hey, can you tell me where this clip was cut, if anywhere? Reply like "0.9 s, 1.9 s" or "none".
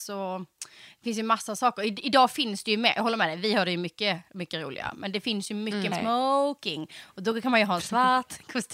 5.9 s